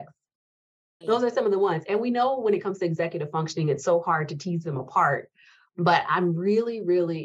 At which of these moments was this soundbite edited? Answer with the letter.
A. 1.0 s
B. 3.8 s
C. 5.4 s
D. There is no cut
A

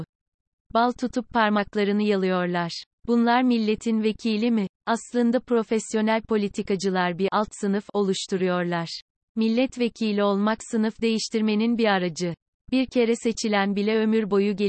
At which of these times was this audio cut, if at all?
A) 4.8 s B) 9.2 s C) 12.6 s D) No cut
D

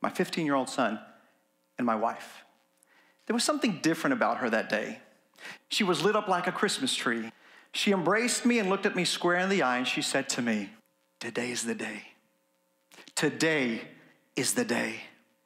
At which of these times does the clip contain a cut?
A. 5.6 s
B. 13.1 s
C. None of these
A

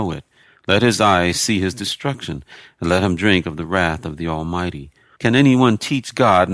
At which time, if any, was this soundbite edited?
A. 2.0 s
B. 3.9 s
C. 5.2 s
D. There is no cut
C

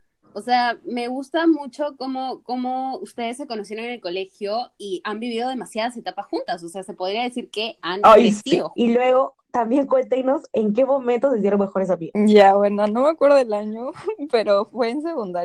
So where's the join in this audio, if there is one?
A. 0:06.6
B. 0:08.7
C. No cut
B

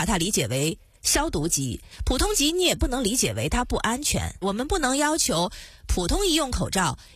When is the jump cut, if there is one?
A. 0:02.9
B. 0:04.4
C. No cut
B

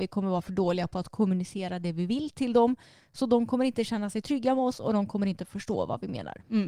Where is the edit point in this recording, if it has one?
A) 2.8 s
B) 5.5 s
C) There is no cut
C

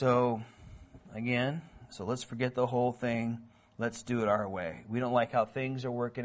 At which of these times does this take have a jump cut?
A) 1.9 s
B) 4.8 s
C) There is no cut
A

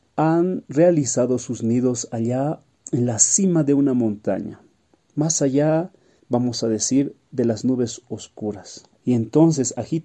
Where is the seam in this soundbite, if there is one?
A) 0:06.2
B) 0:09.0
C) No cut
B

